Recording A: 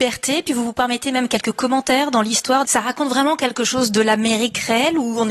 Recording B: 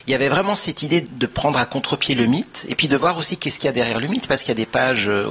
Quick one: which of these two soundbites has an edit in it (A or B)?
A